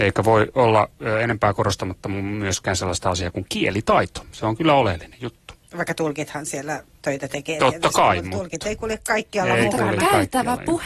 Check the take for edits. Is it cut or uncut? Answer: uncut